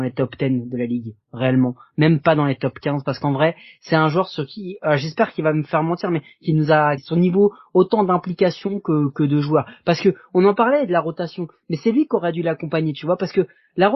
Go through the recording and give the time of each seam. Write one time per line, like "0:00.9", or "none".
0:07.0